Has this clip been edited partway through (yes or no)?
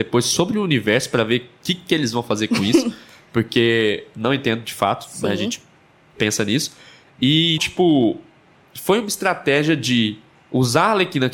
yes